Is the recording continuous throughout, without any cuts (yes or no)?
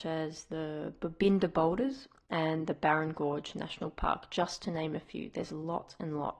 yes